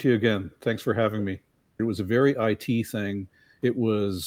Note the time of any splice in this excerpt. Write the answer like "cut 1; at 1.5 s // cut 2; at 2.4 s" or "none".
cut 1; at 1.8 s